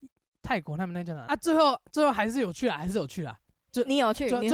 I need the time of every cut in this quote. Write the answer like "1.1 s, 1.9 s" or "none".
1.3 s

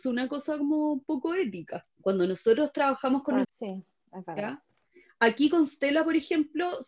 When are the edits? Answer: 1.9 s, 3.4 s

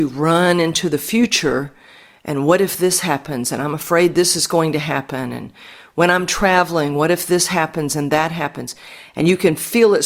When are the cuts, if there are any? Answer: none

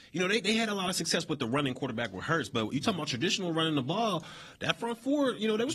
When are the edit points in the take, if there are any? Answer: none

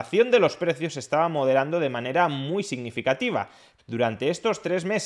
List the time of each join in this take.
3.8 s

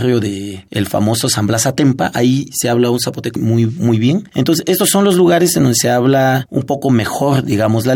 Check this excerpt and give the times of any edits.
3.4 s

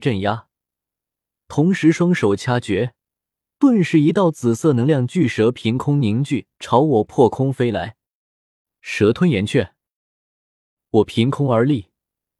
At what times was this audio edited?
6.5 s

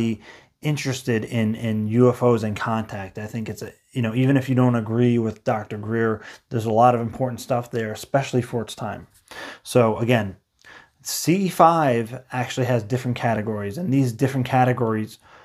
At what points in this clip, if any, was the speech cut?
1.6 s

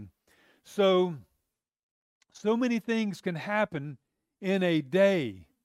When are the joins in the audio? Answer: none

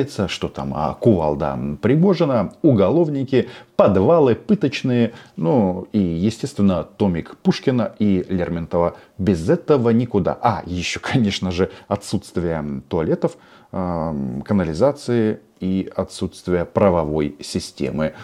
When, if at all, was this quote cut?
none

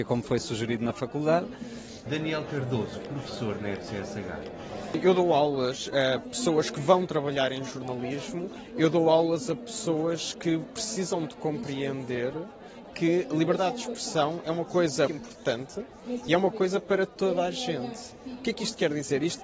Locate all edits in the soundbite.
2.1 s, 15.1 s

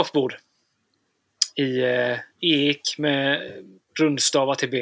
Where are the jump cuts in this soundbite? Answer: 2.3 s

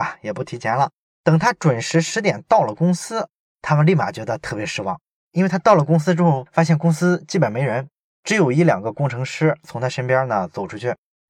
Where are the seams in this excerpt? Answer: none

